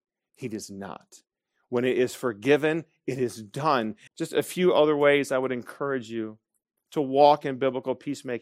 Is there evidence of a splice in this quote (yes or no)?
yes